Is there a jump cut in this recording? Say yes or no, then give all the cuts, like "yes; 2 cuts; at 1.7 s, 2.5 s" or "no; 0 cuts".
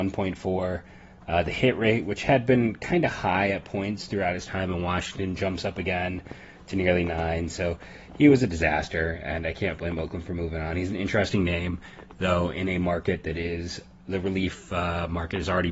no; 0 cuts